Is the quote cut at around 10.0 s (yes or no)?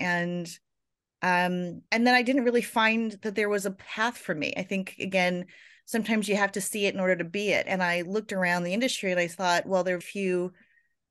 yes